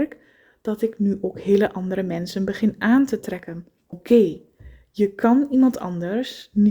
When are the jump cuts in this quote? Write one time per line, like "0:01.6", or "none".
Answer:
0:03.9